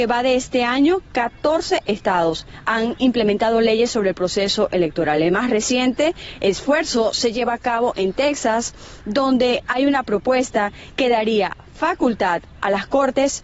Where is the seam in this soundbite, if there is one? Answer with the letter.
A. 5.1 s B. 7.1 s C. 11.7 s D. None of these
D